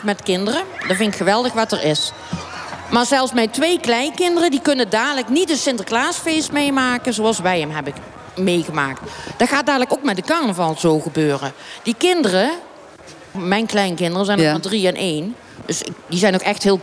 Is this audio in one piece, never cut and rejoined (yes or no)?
no